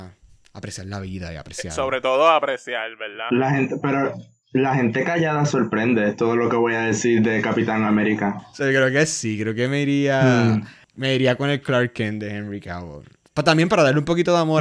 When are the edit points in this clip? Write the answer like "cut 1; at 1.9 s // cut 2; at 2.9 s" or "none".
none